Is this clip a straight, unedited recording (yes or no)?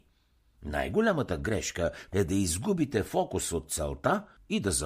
no